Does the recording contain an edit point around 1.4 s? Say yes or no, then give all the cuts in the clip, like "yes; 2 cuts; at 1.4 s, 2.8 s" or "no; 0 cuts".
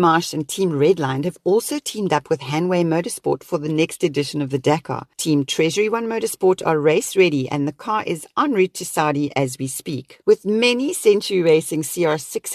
no; 1 cut; at 5.1 s